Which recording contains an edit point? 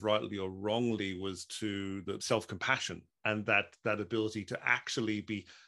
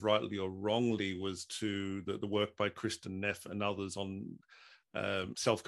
first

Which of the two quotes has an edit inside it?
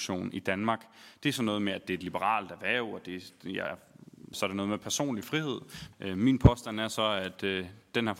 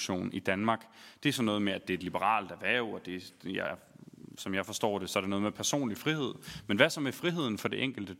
first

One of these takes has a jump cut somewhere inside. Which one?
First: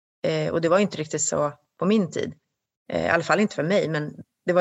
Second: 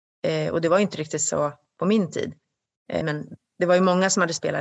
second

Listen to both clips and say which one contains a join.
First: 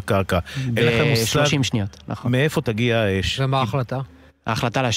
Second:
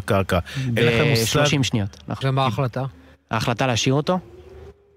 second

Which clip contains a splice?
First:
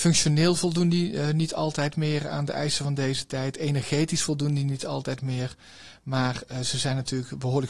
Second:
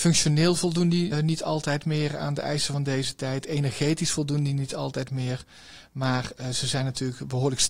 second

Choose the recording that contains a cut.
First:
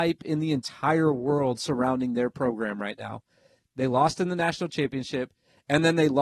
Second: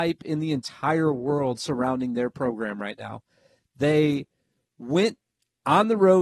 first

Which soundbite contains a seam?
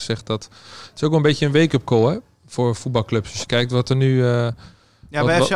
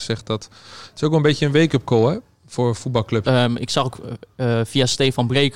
second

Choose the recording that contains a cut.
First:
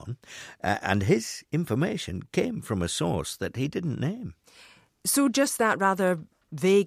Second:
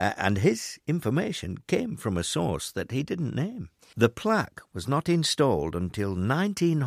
second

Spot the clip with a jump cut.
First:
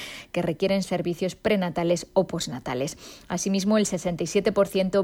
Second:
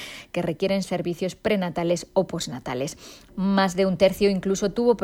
second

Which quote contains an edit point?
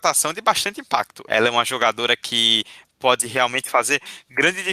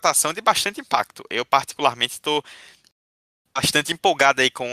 first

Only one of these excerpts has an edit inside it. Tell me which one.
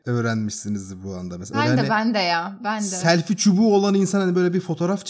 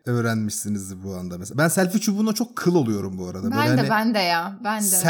first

